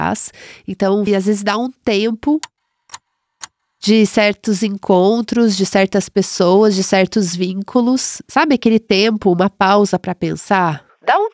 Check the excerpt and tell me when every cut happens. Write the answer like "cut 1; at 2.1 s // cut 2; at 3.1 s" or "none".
cut 1; at 1.1 s